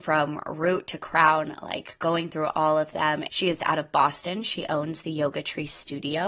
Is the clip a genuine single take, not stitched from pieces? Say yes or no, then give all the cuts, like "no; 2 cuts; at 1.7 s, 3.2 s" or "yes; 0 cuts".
no; 1 cut; at 3.3 s